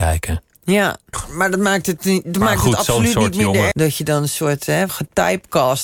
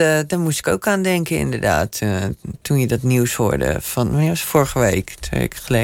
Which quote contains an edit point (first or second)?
first